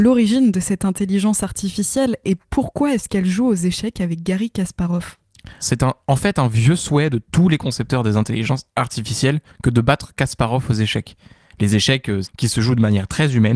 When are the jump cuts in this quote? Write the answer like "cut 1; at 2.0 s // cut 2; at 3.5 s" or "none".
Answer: cut 1; at 5.6 s // cut 2; at 12.2 s